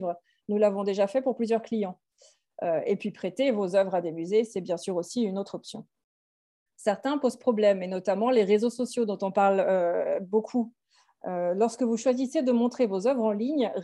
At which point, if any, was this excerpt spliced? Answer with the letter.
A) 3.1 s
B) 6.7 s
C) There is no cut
B